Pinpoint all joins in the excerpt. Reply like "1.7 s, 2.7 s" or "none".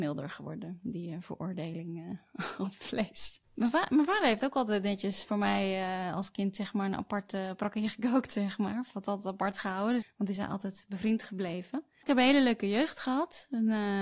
3.4 s, 10.0 s, 12.0 s